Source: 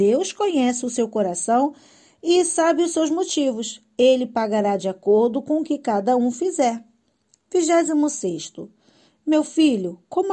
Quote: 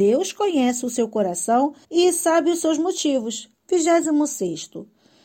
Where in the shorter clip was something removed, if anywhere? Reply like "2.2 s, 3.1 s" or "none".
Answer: 1.8 s, 3.5 s